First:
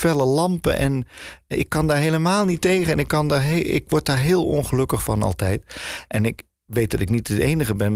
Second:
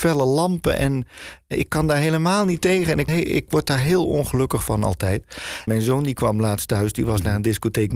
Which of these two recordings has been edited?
second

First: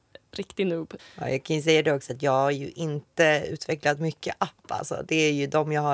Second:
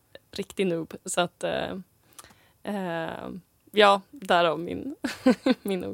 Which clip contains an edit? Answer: first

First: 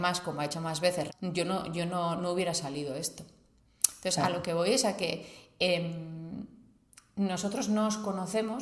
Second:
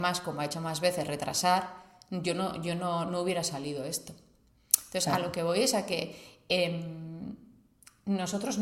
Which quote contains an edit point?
first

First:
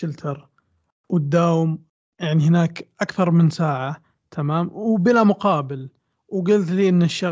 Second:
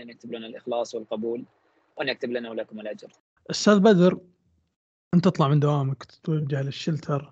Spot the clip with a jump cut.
second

